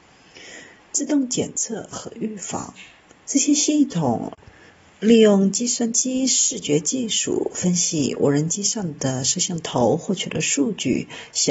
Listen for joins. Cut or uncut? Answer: cut